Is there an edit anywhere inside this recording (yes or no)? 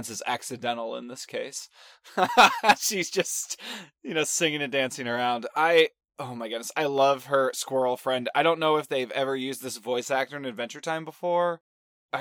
no